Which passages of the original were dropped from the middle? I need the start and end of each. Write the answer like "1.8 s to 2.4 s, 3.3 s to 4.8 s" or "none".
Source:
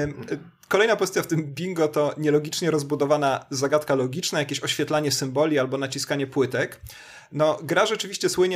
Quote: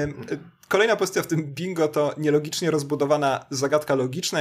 none